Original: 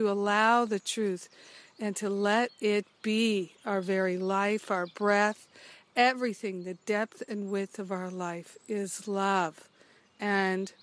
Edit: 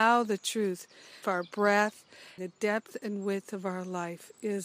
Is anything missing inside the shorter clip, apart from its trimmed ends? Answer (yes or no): yes